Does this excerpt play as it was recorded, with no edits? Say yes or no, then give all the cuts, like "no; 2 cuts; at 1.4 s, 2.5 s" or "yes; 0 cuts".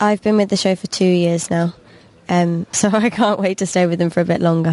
no; 1 cut; at 2.7 s